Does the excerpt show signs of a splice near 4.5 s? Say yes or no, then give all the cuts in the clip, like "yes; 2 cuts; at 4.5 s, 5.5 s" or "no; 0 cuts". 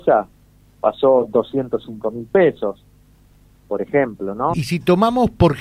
yes; 1 cut; at 4.5 s